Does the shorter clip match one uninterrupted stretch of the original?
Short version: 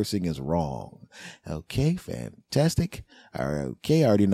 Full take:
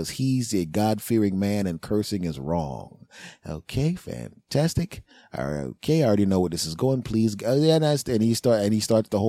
yes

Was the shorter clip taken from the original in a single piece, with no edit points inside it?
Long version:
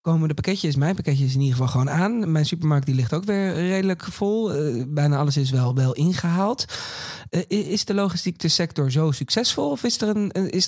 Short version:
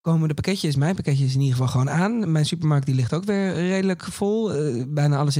yes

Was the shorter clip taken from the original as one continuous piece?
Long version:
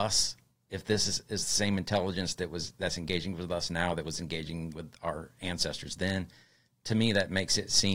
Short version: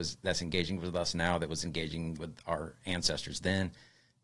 yes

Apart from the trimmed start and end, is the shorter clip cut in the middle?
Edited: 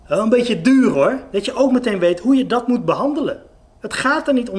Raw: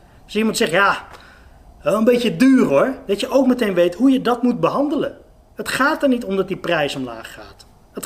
no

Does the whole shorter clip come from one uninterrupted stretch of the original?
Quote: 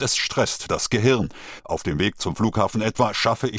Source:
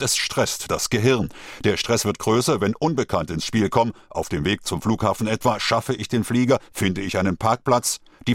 no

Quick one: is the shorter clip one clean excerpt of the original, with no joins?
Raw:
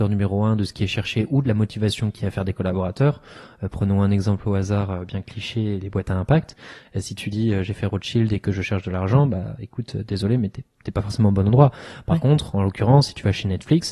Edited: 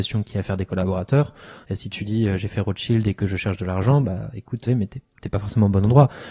no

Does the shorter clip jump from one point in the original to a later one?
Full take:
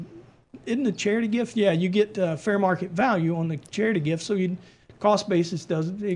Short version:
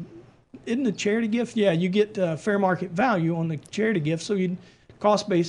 no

